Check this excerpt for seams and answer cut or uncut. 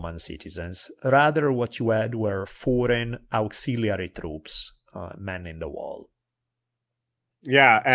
uncut